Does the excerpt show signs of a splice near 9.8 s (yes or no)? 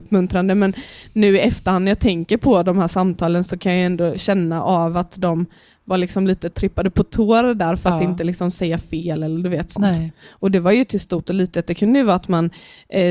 yes